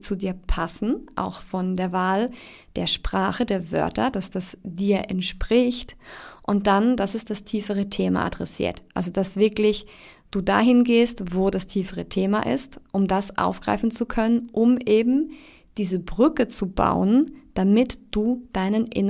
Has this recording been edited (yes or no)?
no